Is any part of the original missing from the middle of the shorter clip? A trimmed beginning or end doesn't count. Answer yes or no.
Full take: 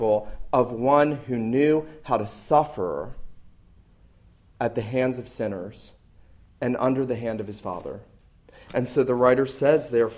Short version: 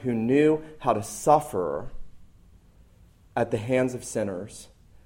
no